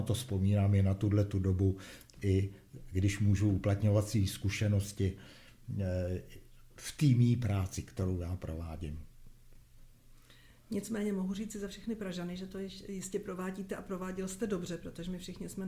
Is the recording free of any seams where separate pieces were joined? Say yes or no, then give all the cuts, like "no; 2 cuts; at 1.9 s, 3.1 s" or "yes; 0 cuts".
yes; 0 cuts